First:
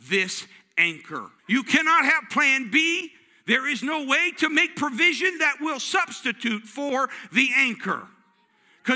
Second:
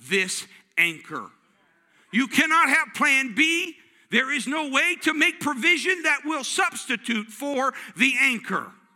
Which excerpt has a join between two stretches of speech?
first; 1 cut; at 1.4 s

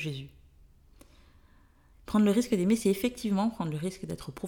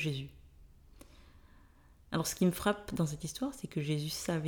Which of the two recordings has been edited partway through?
first; 1 cut; at 1.9 s

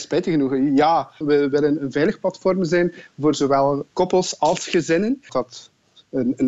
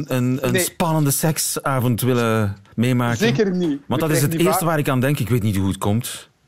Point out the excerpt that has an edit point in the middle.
first; 2 cuts; at 1.2 s, 5.3 s

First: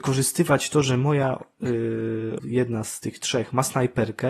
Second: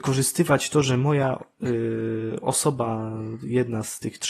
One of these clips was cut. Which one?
first; 1 cut; at 2.4 s

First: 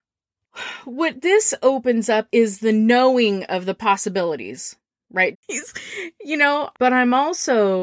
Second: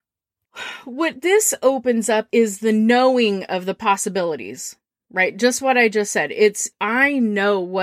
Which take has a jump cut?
first; 2 cuts; at 5.3 s, 6.7 s

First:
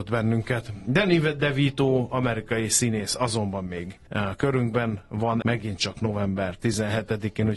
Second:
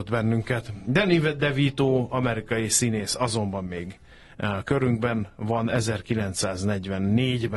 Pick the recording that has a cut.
first; 2 cuts; at 4.1 s, 5.4 s

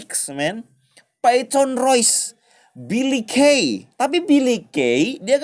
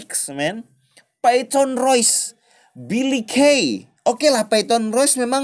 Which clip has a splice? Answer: first; 1 cut; at 3.9 s

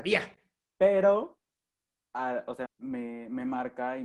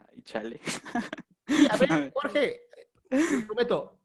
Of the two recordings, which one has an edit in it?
first; 1 cut; at 2.7 s

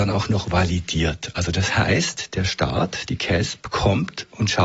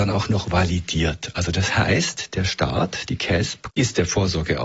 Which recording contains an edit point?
second; 1 cut; at 3.7 s

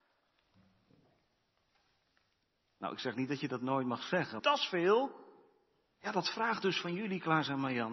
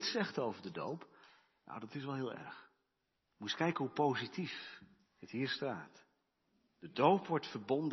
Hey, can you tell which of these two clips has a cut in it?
first; 1 cut; at 4.4 s

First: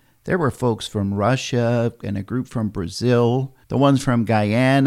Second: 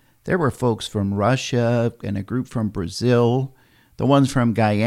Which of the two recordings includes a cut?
first; 1 cut; at 3.6 s

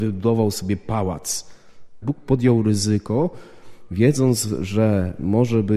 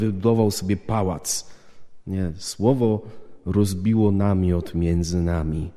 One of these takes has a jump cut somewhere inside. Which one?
first; 1 cut; at 2.0 s

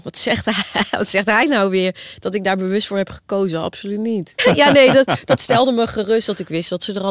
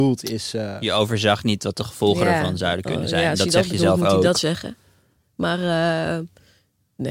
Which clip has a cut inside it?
first; 1 cut; at 4.4 s

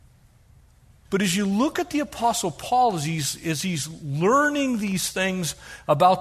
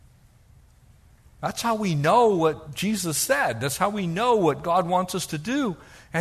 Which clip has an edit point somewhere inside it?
first; 1 cut; at 1.1 s

